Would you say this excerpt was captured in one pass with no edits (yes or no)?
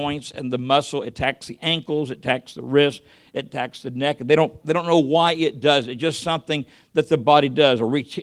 no